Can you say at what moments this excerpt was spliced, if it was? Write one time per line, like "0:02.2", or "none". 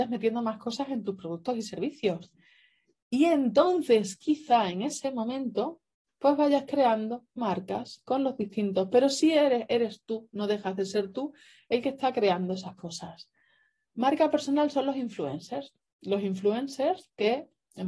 none